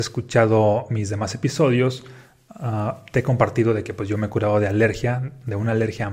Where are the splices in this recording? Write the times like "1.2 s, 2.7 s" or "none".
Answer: none